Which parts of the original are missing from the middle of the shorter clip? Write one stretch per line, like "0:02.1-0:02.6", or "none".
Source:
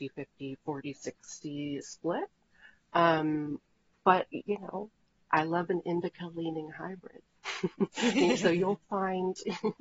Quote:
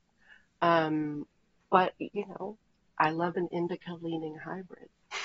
none